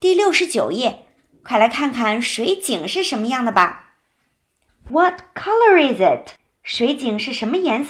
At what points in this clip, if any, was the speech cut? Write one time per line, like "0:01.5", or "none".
0:04.9